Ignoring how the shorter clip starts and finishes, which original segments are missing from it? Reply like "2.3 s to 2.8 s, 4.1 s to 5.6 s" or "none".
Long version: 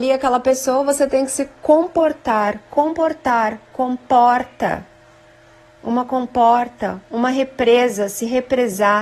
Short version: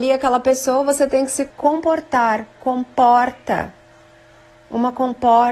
1.5 s to 2.6 s